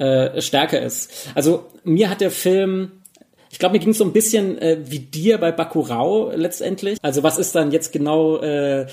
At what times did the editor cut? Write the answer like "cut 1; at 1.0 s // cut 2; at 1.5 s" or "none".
cut 1; at 7.0 s